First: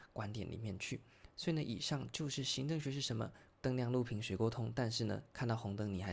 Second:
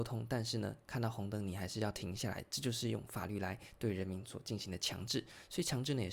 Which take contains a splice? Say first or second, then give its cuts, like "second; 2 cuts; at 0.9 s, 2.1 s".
first; 1 cut; at 3.5 s